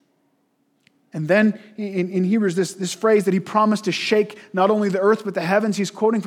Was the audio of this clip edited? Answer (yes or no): no